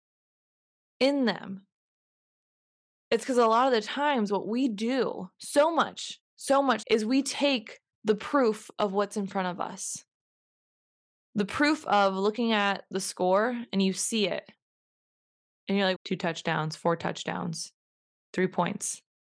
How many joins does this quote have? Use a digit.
2